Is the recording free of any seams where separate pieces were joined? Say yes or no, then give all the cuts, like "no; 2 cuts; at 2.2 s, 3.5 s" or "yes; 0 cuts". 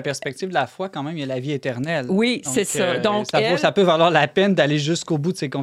yes; 0 cuts